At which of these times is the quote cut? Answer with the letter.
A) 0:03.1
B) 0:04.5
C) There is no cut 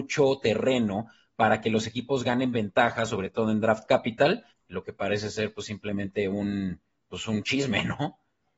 B